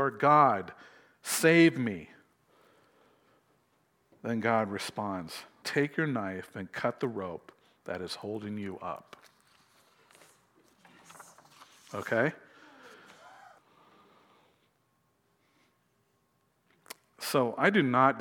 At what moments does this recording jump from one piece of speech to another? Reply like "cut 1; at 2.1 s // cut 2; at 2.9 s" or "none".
cut 1; at 5.6 s // cut 2; at 13.6 s